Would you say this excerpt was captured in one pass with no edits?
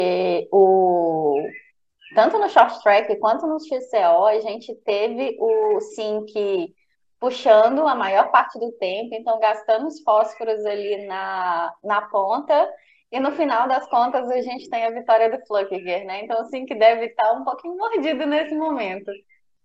yes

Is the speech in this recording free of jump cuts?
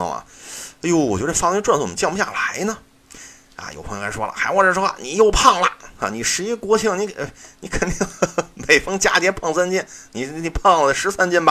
yes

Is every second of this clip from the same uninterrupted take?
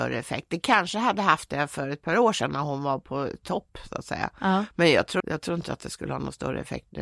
no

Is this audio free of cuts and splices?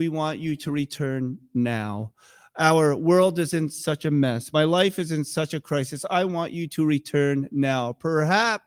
yes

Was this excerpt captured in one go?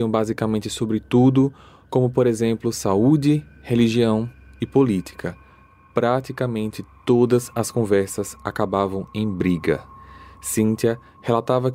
yes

